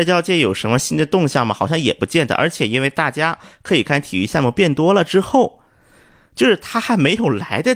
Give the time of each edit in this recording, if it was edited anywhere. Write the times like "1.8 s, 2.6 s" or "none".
none